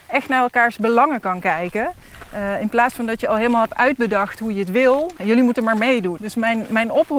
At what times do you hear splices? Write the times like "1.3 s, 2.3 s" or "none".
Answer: 5.2 s, 6.2 s

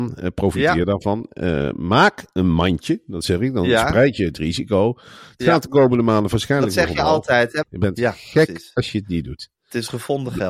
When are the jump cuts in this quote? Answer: 7.6 s

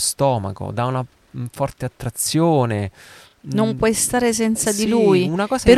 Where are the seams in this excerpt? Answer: none

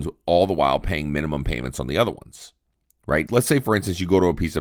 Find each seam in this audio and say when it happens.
3.3 s

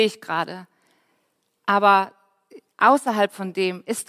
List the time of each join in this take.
1.6 s

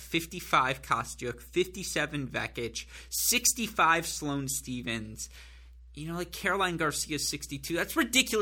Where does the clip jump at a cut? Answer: none

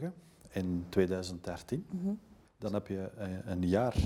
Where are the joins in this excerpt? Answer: 2.4 s

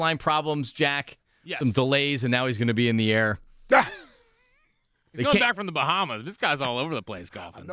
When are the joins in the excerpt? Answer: none

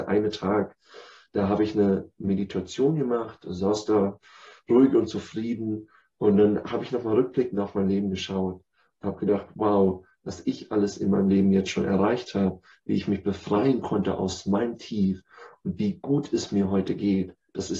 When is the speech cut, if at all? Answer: none

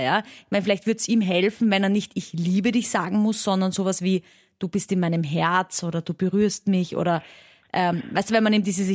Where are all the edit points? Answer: none

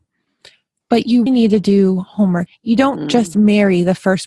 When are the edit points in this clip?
1.3 s, 2.5 s

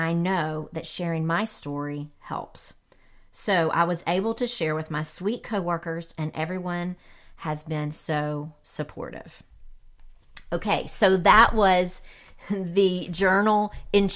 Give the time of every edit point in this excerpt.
none

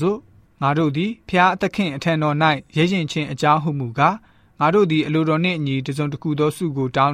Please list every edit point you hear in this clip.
none

